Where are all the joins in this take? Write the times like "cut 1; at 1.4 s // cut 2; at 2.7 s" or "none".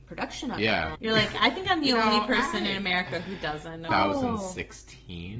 cut 1; at 0.9 s // cut 2; at 3.9 s